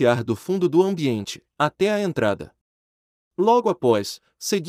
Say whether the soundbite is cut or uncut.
uncut